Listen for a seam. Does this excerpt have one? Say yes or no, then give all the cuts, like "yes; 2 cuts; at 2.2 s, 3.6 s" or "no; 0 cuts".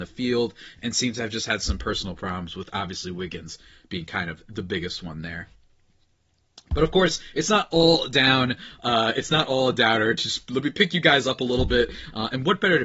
no; 0 cuts